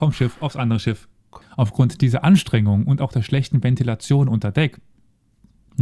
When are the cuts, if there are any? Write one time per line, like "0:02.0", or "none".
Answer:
0:01.4